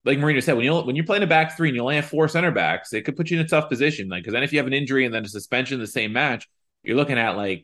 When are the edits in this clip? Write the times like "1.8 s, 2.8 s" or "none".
none